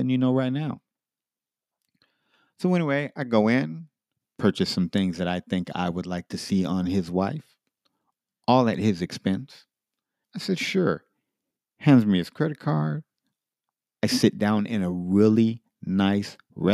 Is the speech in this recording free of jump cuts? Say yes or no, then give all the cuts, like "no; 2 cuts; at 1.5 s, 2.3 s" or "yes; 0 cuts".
no; 1 cut; at 10.2 s